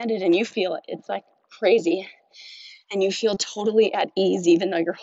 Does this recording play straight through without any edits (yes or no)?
yes